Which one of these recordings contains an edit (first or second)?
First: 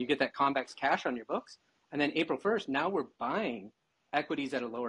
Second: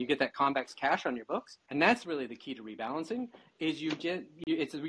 second